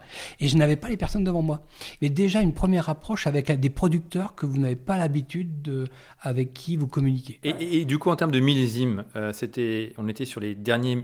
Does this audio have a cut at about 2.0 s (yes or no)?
yes